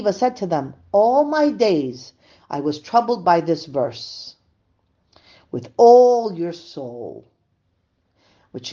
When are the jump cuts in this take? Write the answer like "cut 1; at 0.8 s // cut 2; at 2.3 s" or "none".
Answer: none